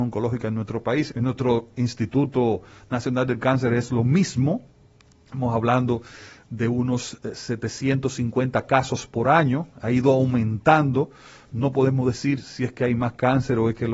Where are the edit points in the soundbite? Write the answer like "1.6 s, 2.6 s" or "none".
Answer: 1.1 s

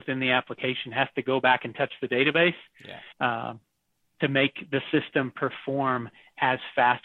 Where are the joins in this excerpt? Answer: 3.1 s

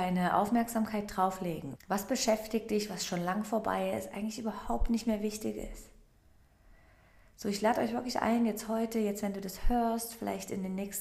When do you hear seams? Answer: 1.8 s

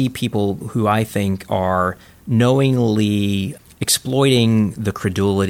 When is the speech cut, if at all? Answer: none

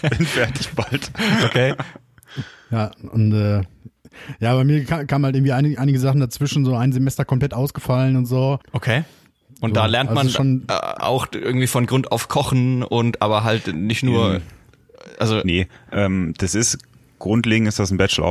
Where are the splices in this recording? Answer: 8.6 s

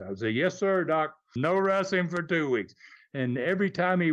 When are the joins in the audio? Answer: 1.4 s, 3.0 s

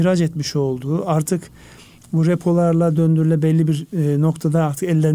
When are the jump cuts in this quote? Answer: 3.0 s

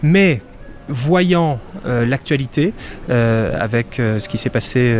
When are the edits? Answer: none

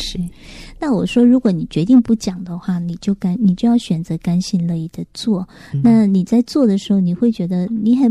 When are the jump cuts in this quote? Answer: none

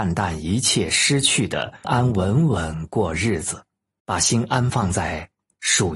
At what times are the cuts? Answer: 1.8 s, 4.0 s

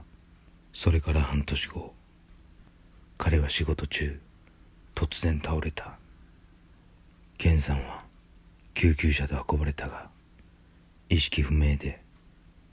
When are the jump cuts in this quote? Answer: none

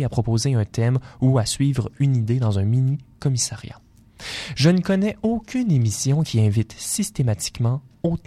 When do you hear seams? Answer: none

